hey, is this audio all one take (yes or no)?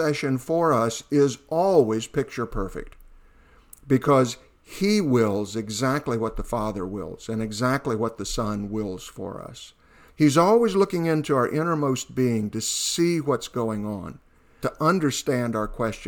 no